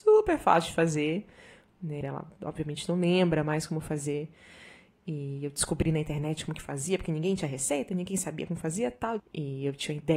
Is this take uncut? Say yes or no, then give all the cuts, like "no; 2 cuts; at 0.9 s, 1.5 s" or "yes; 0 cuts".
no; 2 cuts; at 2.0 s, 9.2 s